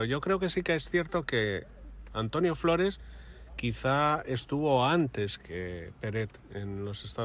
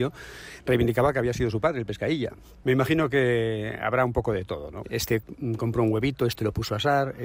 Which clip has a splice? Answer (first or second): second